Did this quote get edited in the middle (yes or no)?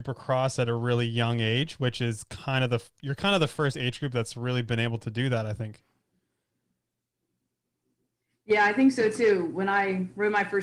no